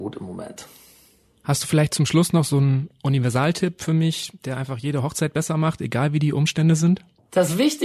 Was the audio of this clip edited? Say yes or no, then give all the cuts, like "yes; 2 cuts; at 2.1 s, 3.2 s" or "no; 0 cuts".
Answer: no; 0 cuts